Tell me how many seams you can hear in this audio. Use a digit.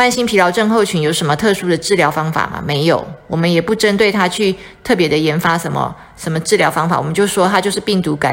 0